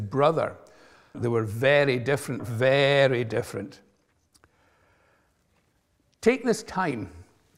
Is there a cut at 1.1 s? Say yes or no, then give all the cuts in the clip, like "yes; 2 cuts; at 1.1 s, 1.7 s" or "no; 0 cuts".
yes; 2 cuts; at 1.1 s, 2.4 s